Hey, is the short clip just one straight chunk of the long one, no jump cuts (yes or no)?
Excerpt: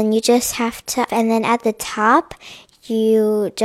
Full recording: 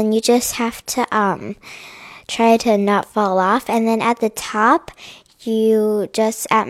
no